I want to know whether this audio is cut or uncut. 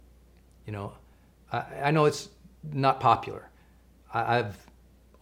uncut